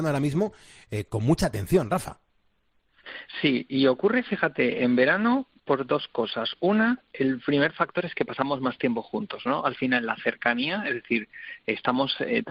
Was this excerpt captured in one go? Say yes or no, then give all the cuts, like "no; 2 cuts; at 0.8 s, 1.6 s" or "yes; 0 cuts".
yes; 0 cuts